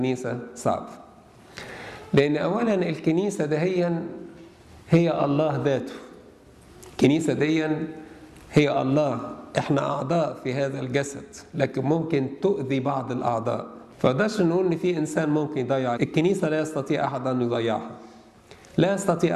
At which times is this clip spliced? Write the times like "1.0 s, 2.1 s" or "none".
13.9 s, 16.0 s